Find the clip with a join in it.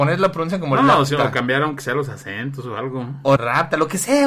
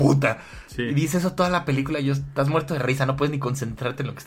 first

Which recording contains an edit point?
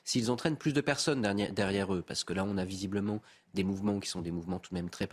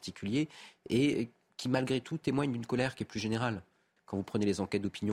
second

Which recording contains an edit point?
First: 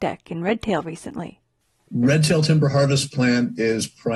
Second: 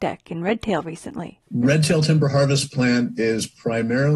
second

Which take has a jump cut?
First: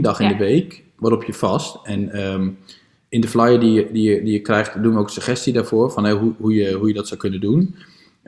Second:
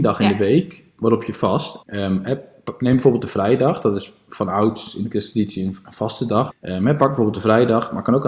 second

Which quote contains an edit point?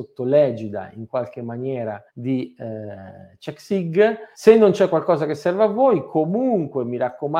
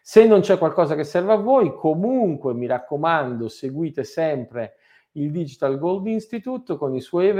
first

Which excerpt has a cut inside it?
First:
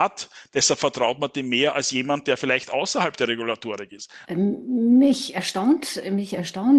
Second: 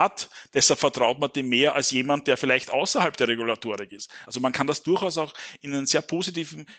first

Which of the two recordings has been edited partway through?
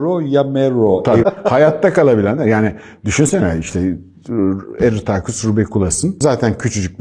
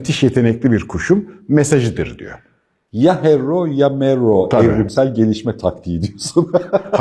first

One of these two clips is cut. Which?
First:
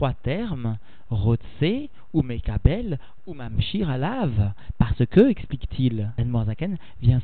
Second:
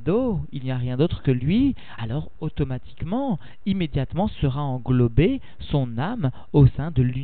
second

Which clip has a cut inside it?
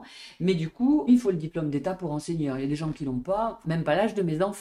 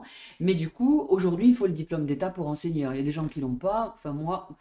first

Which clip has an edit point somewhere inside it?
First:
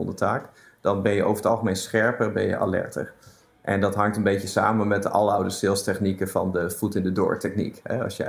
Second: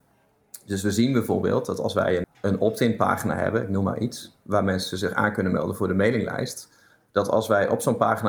second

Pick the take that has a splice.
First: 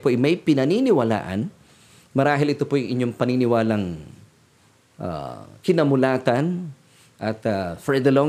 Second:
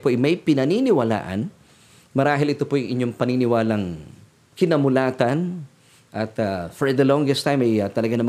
second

